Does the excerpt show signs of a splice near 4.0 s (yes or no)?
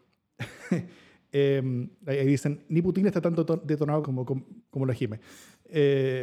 yes